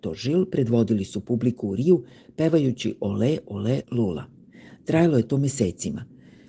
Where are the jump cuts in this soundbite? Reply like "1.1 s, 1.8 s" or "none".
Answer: 3.8 s